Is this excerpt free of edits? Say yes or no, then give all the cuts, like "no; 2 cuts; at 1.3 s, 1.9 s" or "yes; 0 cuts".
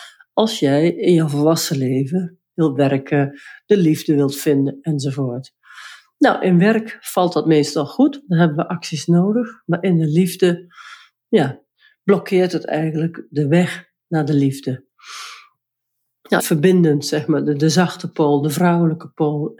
no; 1 cut; at 16.4 s